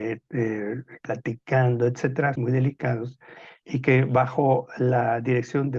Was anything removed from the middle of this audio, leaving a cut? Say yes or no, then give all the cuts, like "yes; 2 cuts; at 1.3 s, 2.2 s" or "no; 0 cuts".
yes; 2 cuts; at 1.0 s, 2.3 s